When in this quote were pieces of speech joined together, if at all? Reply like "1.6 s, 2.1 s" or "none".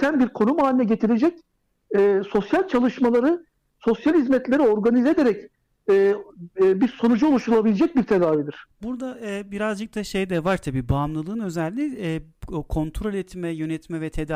none